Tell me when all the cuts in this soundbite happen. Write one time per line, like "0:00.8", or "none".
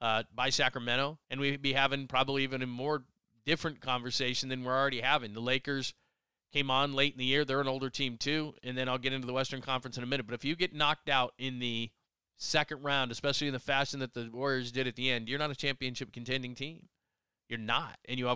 0:01.2